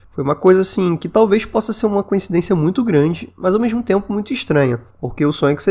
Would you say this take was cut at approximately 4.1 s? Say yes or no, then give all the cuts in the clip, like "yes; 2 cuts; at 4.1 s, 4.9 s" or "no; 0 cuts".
no; 0 cuts